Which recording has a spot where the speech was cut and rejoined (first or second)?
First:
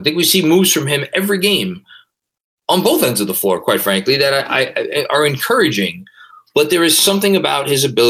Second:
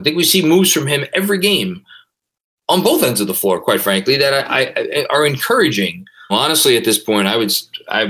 second